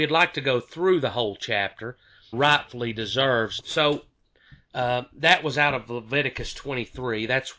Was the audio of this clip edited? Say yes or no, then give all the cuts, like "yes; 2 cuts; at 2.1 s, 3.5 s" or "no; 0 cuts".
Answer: yes; 2 cuts; at 2.3 s, 3.6 s